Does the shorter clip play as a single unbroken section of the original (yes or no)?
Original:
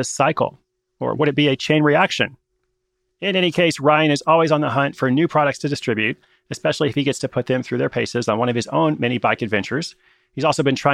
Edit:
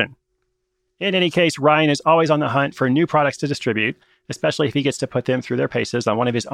yes